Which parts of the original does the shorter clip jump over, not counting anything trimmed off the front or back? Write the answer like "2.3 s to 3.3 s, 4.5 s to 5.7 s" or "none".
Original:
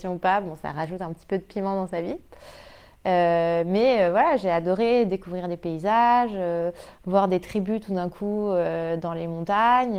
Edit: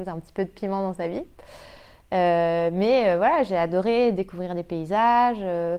none